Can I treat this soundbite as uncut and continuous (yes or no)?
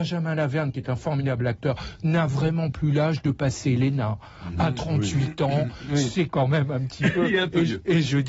yes